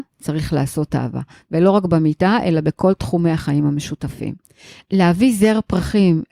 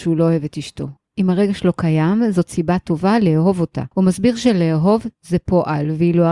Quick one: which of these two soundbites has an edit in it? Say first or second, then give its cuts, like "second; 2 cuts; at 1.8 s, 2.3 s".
second; 2 cuts; at 1.0 s, 3.9 s